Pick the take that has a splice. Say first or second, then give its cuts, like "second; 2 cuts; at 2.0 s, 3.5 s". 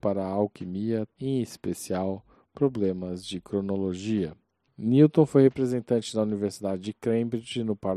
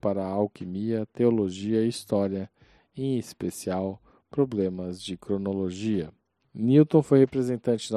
first; 1 cut; at 1.1 s